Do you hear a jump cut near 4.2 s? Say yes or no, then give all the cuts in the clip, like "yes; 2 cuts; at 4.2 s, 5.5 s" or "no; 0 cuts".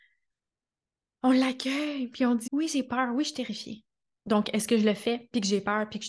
yes; 2 cuts; at 2.5 s, 4.2 s